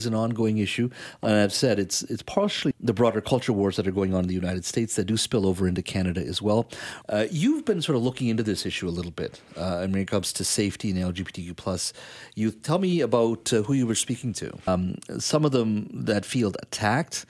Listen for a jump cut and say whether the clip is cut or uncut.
cut